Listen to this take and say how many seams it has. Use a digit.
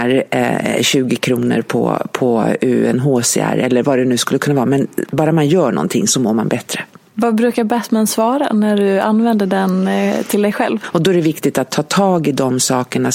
2